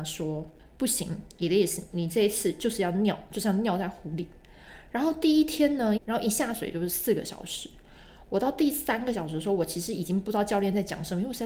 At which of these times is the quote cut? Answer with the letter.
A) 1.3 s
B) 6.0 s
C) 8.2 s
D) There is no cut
B